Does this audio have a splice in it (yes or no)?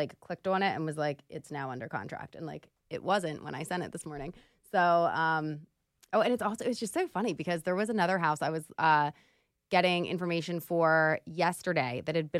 no